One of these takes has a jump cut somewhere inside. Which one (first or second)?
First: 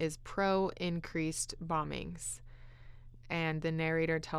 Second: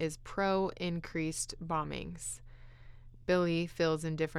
first